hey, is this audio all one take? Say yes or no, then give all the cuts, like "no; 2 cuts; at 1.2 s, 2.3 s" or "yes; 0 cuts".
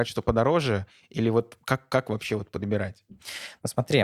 yes; 0 cuts